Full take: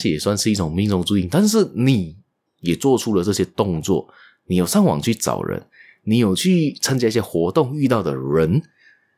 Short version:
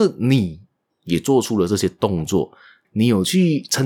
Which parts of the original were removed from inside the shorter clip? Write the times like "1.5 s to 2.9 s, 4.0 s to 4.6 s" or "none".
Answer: 4.4 s to 6.0 s